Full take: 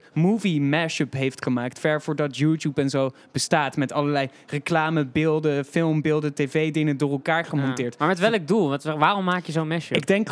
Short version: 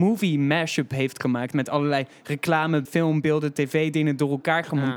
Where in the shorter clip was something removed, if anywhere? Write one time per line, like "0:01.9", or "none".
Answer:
0:01.5
0:02.9